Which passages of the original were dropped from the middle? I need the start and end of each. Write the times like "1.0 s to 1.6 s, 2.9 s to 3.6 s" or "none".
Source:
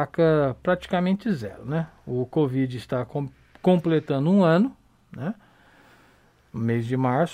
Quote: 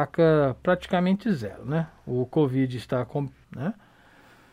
3.4 s to 5.0 s